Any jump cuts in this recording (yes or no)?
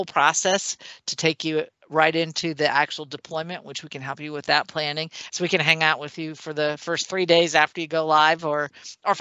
yes